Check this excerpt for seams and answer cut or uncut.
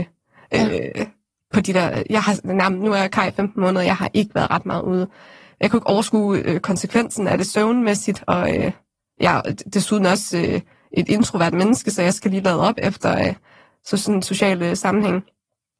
uncut